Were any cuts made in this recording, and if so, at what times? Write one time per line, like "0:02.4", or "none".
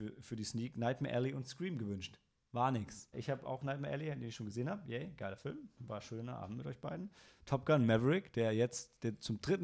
0:03.1